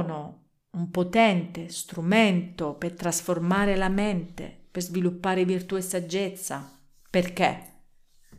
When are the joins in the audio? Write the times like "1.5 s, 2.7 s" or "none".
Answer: none